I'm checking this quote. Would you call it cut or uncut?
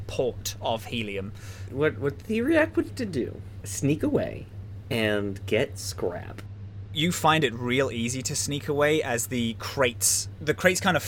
cut